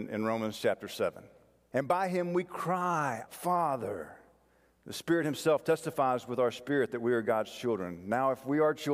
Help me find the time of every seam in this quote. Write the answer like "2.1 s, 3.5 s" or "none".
1.7 s, 3.3 s